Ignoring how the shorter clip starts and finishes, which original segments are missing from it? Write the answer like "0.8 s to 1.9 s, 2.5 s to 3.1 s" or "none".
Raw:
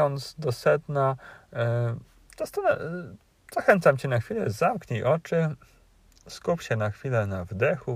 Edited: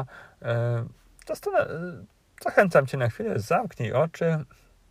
none